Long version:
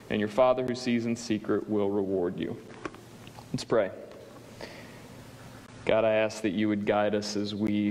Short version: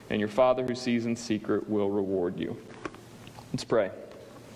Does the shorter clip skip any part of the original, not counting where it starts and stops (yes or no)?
no